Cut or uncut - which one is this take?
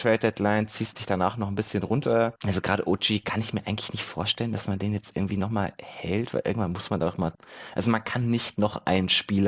uncut